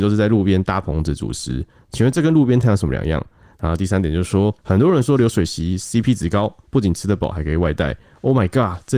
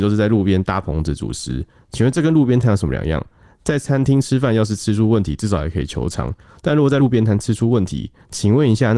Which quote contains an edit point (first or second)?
first